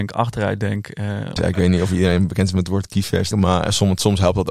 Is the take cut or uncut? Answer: cut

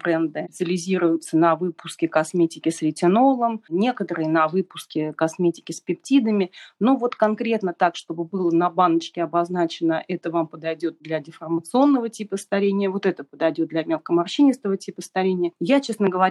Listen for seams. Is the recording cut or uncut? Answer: uncut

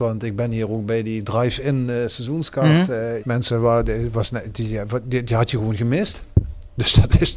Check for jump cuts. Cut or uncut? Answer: cut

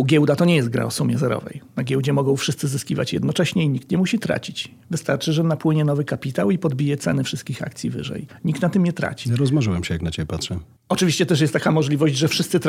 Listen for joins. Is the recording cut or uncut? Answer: cut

